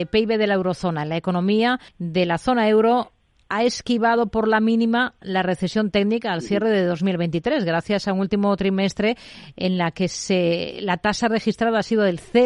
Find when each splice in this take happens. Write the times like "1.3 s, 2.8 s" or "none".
1.9 s